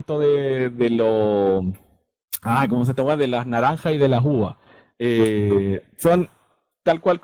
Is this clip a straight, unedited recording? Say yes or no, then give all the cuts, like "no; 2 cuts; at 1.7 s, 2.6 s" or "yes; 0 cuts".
yes; 0 cuts